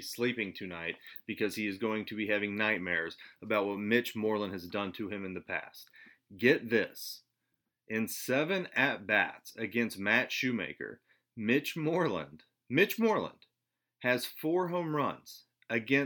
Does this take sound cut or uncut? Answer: uncut